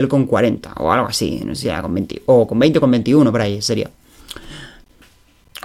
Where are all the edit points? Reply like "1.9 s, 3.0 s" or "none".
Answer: none